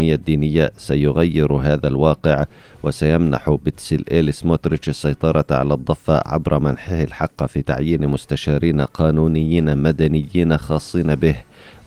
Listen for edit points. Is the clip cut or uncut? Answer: uncut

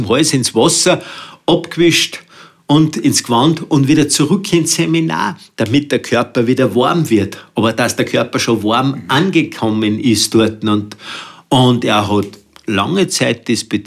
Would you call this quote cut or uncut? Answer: uncut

